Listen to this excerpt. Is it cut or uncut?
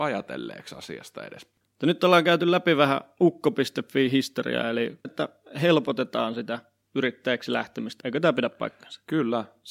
cut